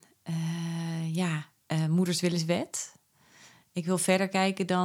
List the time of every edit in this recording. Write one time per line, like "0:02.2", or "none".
none